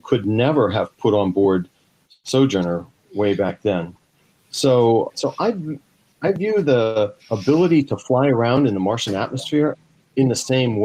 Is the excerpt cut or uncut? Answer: cut